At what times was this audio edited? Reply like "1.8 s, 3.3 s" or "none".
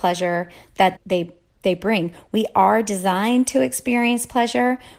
1.0 s

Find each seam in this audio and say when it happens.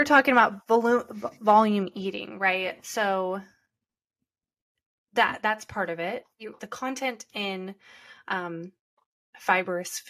6.6 s

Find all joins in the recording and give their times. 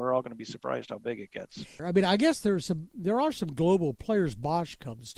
1.8 s

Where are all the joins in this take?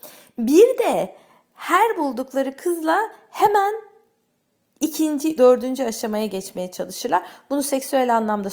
5.4 s

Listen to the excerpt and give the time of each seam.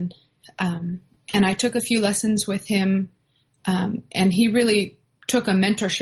none

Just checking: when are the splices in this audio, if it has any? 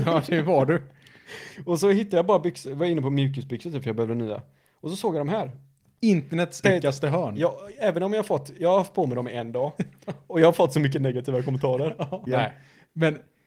6.6 s, 12.3 s

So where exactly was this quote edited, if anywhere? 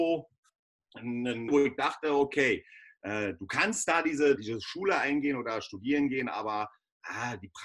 1.5 s, 4.4 s

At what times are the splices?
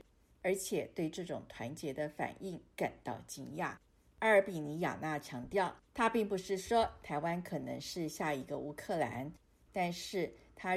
5.9 s

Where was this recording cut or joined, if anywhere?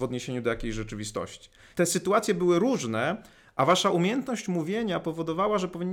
1.7 s

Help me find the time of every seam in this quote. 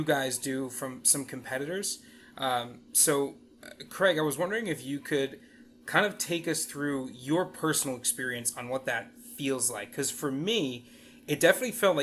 none

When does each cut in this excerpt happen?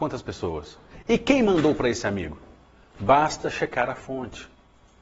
2.9 s

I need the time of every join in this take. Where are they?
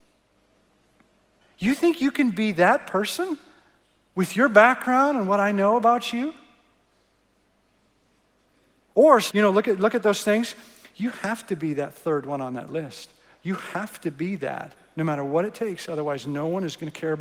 1.4 s, 9.3 s

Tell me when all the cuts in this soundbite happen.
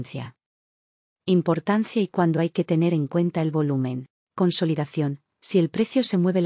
4.2 s

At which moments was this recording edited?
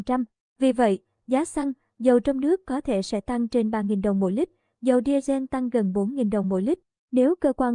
none

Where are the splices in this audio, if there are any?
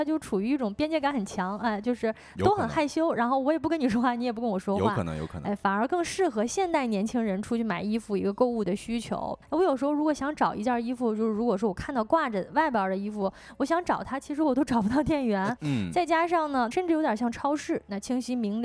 9.4 s, 15.6 s, 16.7 s

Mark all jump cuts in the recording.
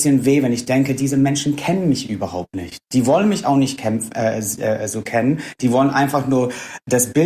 none

